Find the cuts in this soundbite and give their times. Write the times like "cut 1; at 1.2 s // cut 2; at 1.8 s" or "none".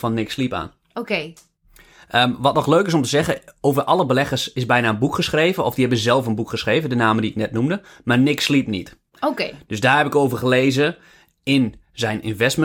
none